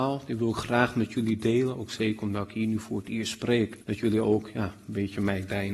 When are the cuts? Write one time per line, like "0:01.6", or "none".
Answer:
0:03.8